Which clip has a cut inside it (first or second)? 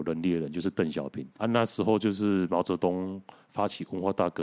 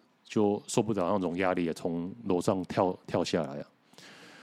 first